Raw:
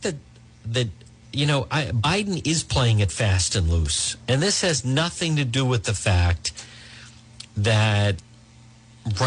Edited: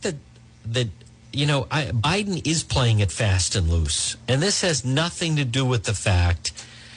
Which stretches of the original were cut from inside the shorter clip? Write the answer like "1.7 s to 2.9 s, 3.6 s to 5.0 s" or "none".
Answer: none